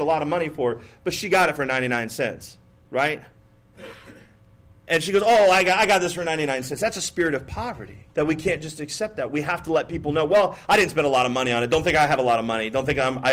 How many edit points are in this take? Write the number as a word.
one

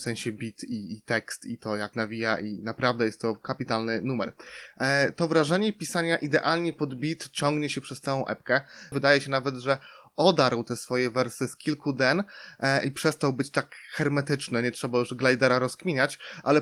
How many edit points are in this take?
two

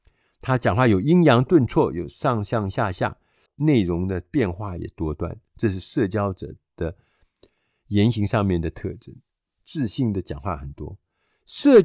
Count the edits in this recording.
two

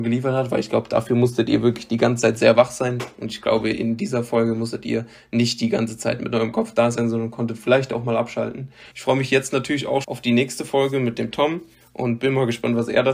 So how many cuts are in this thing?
two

